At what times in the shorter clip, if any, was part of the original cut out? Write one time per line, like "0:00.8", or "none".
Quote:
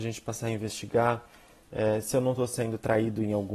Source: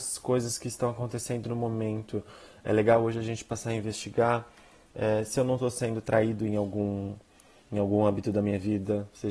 none